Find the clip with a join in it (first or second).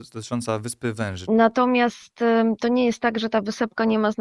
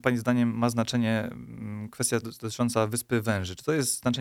first